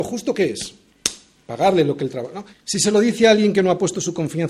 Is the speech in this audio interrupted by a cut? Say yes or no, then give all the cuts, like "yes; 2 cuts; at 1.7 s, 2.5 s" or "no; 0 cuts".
yes; 1 cut; at 2.5 s